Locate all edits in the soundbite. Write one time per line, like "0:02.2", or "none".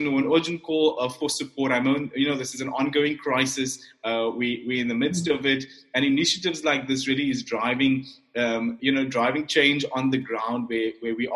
0:08.8